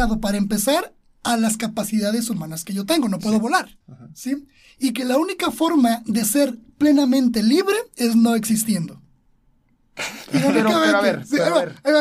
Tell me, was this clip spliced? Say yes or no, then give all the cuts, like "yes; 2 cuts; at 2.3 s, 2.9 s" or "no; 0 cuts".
yes; 1 cut; at 3.8 s